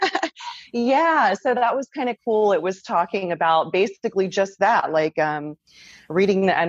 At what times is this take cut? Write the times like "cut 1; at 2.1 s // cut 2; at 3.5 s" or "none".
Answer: none